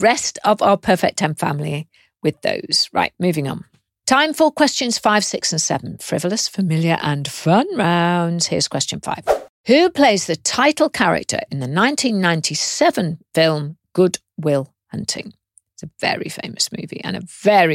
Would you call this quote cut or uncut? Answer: uncut